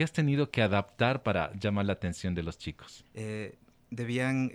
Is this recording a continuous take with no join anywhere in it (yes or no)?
no